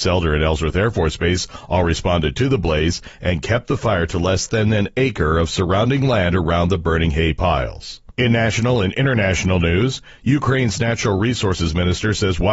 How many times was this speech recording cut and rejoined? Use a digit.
1